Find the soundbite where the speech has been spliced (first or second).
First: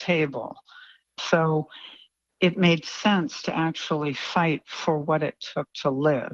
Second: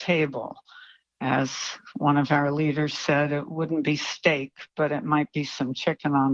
first